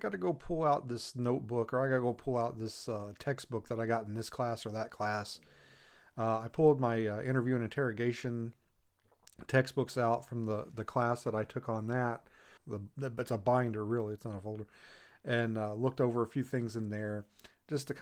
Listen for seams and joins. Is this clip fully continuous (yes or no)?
no